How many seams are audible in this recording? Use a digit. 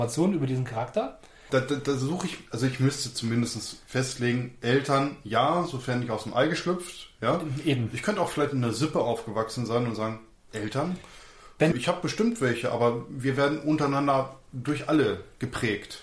2